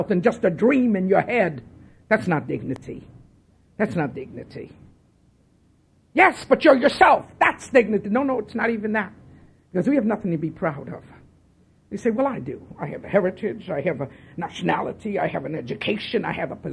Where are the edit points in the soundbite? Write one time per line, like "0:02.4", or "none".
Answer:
none